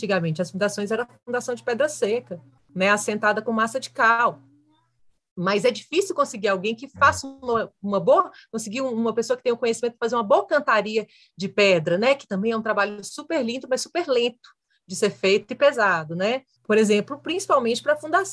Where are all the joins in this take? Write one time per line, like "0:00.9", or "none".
0:16.6